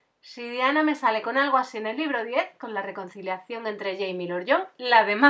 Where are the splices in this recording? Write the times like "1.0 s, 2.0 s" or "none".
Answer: none